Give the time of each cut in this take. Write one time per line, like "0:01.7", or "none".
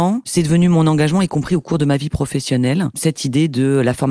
none

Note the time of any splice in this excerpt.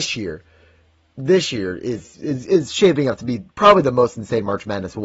none

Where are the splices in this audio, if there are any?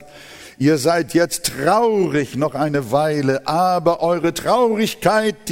none

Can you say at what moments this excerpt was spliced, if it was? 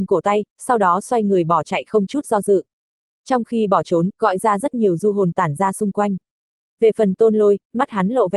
0:04.1

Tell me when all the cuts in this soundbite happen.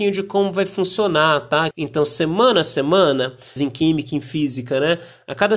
0:01.7
0:03.6

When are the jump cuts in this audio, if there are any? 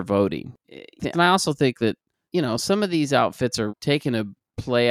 0:01.1
0:03.7

